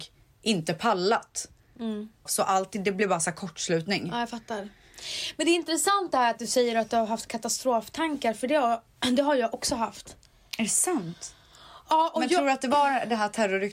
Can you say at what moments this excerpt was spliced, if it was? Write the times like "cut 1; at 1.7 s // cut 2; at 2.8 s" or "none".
cut 1; at 2.3 s